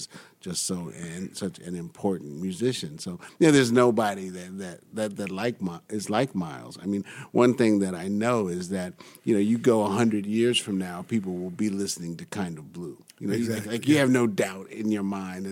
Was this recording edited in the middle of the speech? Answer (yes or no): no